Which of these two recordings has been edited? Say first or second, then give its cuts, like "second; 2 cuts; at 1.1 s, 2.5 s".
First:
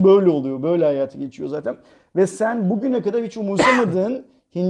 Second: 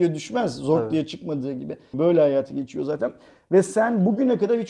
second; 1 cut; at 1.9 s